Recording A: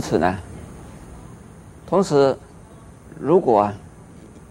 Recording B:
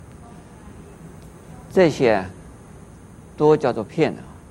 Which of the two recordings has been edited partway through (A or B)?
A